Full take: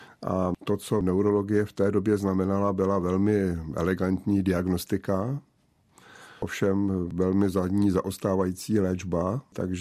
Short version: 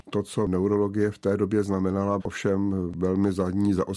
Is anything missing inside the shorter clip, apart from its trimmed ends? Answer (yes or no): yes